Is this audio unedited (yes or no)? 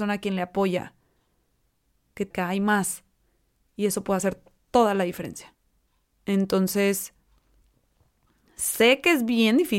no